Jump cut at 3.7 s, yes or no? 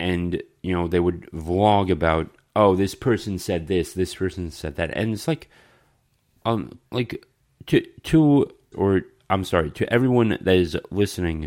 no